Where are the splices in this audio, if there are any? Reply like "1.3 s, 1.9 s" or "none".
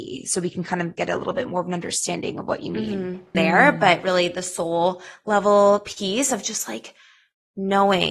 3.3 s